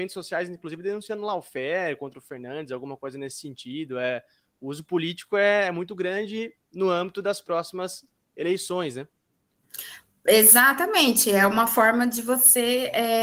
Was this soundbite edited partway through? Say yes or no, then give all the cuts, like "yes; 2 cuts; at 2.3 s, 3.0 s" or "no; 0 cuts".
no; 0 cuts